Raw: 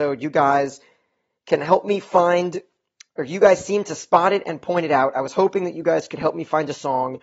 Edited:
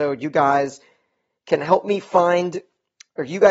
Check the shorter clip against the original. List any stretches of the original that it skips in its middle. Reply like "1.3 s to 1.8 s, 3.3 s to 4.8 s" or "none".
none